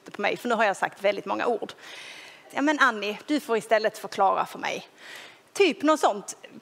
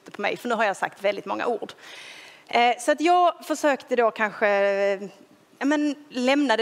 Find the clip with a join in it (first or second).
first